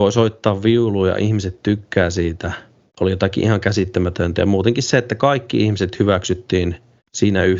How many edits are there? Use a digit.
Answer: 0